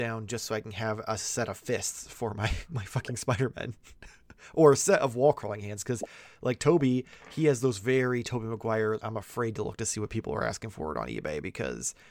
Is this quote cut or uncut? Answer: cut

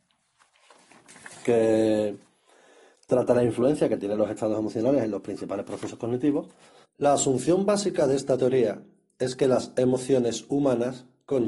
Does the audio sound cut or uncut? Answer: cut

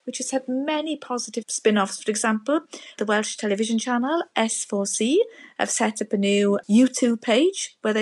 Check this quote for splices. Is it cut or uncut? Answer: uncut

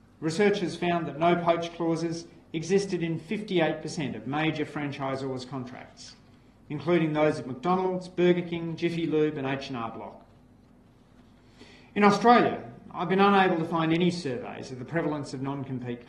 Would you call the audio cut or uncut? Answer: uncut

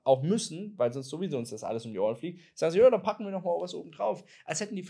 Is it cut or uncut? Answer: uncut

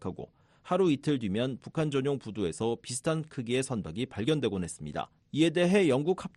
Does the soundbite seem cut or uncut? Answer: cut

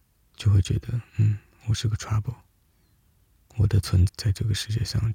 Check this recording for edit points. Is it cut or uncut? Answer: cut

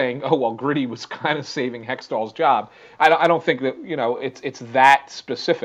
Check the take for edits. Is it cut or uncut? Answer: uncut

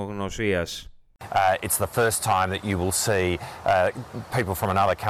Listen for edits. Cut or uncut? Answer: cut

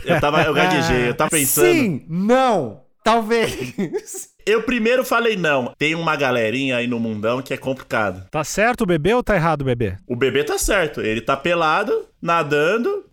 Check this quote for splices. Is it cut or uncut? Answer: cut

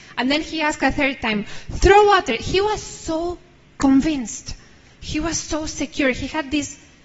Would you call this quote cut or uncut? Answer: uncut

